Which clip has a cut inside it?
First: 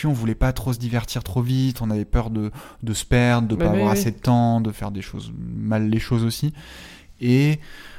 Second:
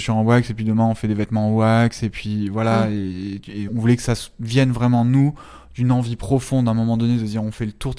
second; 1 cut; at 3.7 s

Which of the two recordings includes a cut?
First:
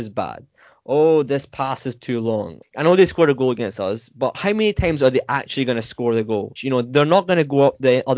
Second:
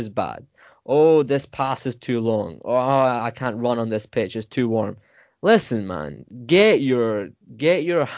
first; 2 cuts; at 2.6 s, 6.6 s

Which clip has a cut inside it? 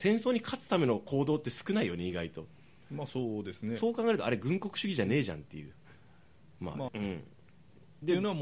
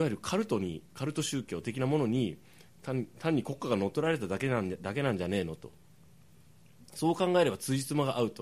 first; 1 cut; at 6.9 s

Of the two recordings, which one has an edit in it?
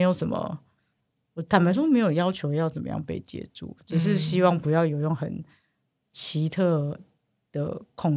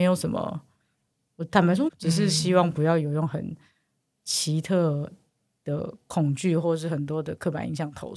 second; 1 cut; at 1.9 s

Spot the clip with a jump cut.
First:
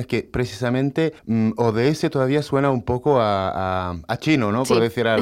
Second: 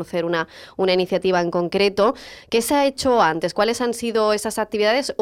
first; 1 cut; at 1.2 s

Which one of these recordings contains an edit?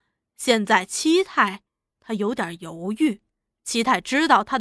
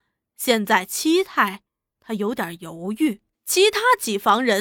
second; 1 cut; at 3.3 s

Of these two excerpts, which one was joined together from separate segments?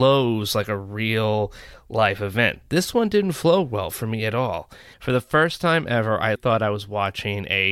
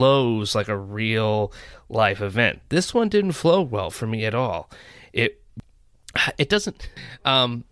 first; 2 cuts; at 4.9 s, 6.4 s

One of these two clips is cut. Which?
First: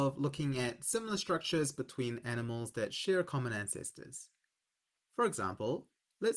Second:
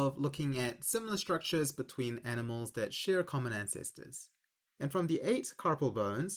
second; 1 cut; at 4.7 s

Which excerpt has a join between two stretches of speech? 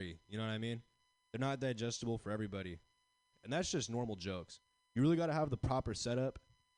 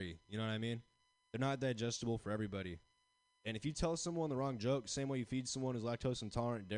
first; 2 cuts; at 3.3 s, 4.8 s

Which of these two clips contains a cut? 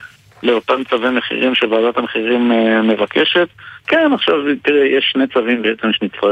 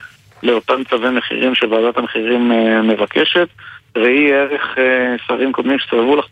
first; 1 cut; at 3.8 s

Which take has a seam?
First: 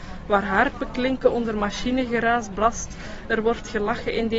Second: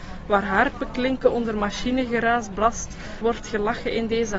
second; 1 cut; at 3.2 s

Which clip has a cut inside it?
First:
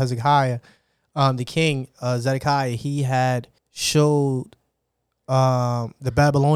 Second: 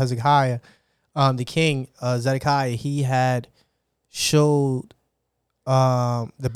first; 1 cut; at 3.6 s

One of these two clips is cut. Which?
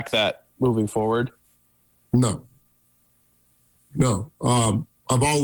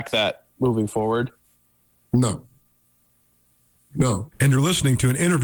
second; 1 cut; at 4.3 s

